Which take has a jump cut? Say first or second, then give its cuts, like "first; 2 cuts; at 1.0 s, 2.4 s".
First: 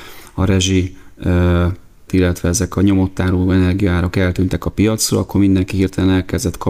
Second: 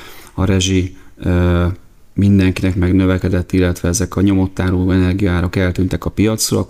first; 1 cut; at 2.1 s